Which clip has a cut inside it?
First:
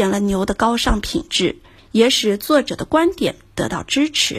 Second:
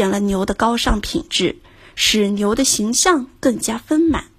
first; 1 cut; at 1.8 s

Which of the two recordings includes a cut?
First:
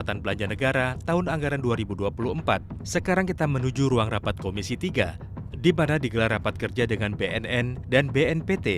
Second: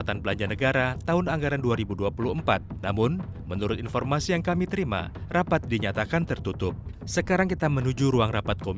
first; 1 cut; at 2.8 s

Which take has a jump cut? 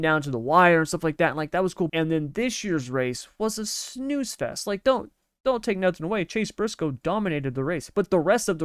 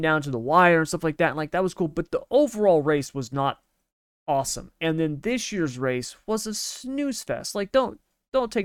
first; 1 cut; at 1.9 s

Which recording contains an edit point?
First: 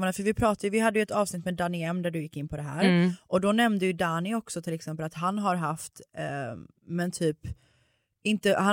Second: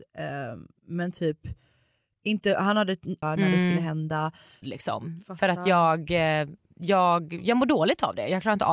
second; 2 cuts; at 3.2 s, 4.6 s

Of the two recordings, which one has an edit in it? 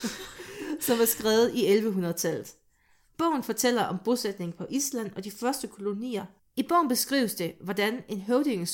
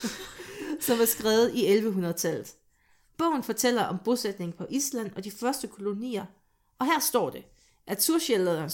first; 1 cut; at 6.4 s

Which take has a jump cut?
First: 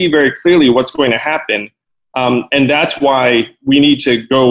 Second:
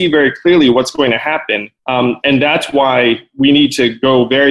second; 1 cut; at 1.8 s

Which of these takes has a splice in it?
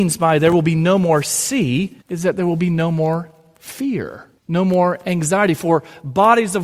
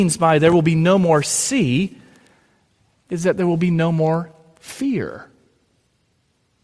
first; 2 cuts; at 2.0 s, 4.4 s

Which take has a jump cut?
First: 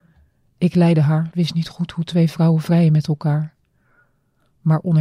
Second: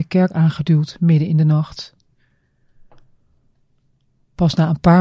first; 1 cut; at 1.3 s

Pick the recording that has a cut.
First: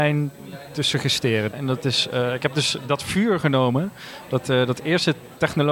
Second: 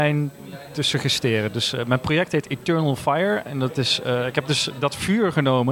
first; 1 cut; at 1.5 s

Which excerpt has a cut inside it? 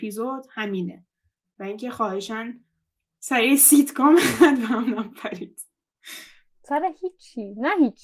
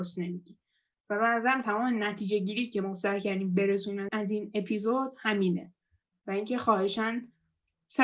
second; 1 cut; at 4.1 s

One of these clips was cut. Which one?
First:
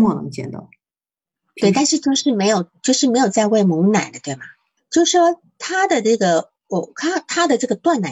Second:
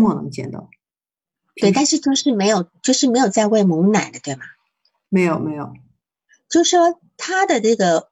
first; 1 cut; at 4.8 s

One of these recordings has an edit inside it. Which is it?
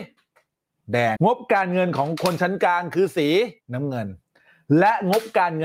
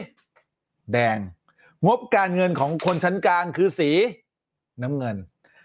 first; 2 cuts; at 1.2 s, 3.6 s

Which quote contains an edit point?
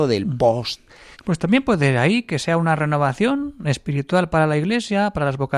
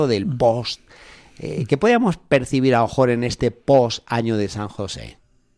first; 1 cut; at 1.1 s

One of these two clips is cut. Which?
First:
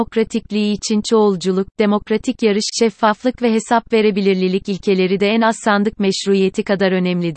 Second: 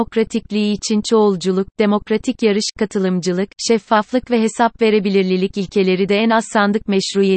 first; 1 cut; at 2.7 s

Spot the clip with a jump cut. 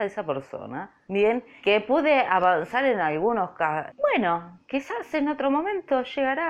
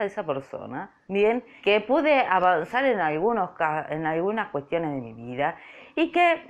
first; 1 cut; at 3.9 s

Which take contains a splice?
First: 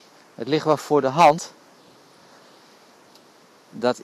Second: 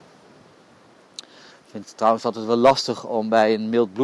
second; 1 cut; at 1.5 s

